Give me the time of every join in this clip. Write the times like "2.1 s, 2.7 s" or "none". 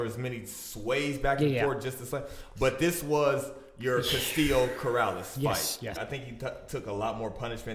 5.9 s